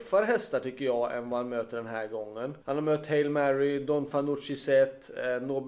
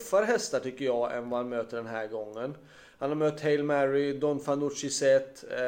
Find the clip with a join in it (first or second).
first